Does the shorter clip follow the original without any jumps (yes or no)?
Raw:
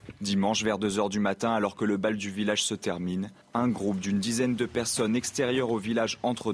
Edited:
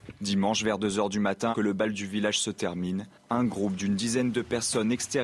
no